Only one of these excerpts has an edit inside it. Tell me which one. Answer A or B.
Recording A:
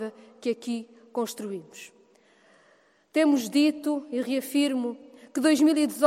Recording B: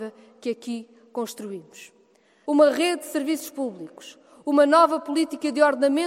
B